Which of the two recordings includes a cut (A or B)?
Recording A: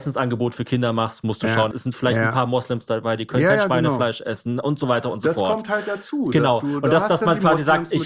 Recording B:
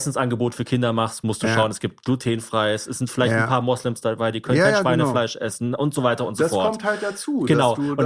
A